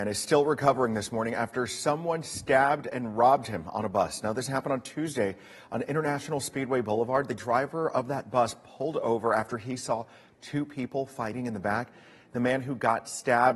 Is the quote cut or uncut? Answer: uncut